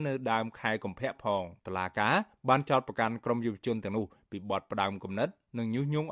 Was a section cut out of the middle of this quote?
yes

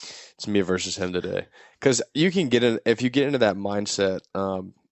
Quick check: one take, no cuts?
yes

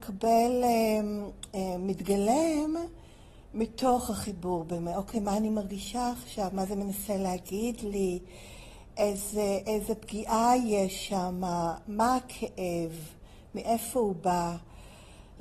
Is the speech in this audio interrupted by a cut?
no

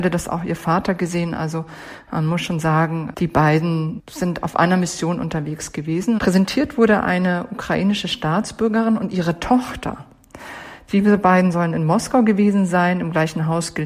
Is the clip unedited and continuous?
no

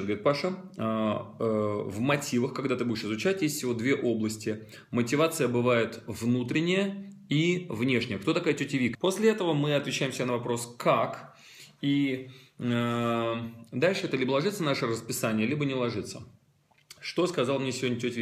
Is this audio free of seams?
no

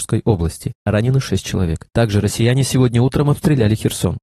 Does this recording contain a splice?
no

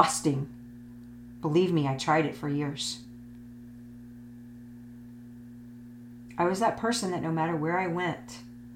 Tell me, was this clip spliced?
no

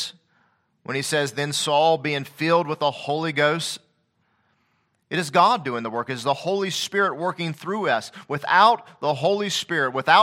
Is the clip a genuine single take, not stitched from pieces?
yes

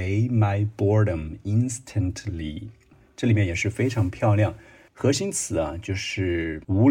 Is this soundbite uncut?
yes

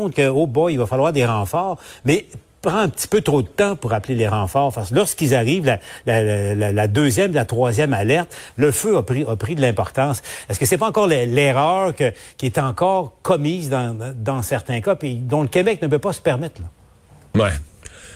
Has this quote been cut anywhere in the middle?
no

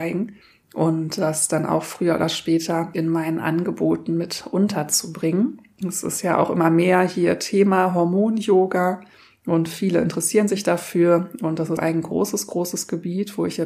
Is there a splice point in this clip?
yes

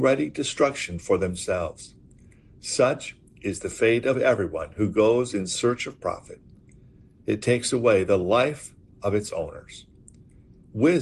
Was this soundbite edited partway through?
no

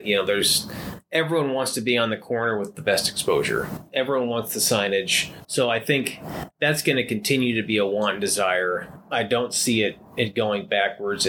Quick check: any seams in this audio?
yes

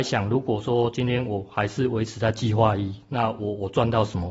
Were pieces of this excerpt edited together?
no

